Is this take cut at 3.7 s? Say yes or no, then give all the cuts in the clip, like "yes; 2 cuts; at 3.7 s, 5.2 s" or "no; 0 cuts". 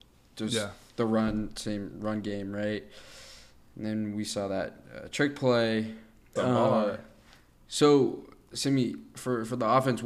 no; 1 cut; at 6.4 s